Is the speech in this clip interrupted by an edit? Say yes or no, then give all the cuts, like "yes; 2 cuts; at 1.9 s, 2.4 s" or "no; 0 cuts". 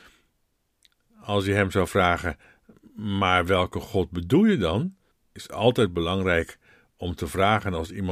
no; 0 cuts